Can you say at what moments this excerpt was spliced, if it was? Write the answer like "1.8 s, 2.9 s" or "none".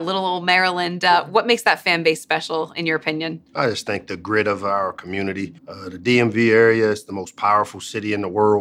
5.6 s

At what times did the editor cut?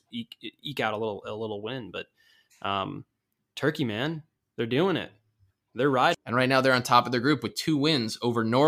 6.1 s

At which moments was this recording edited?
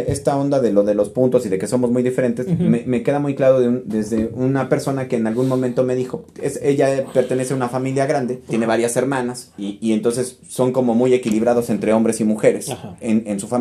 8.5 s

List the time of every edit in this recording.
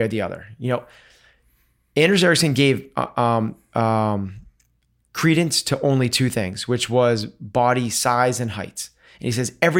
none

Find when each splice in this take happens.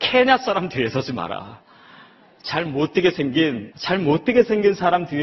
3.7 s

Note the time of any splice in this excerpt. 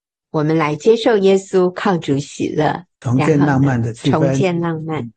2.9 s

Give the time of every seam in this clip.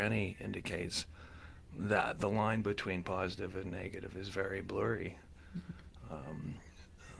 none

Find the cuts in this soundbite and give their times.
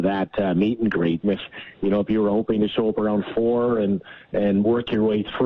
1.2 s

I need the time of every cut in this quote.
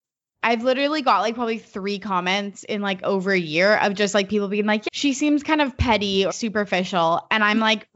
4.9 s, 6.3 s

